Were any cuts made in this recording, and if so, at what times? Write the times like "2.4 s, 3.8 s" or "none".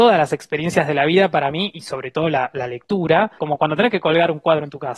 3.4 s